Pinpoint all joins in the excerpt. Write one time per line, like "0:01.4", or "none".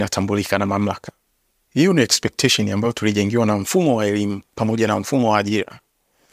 none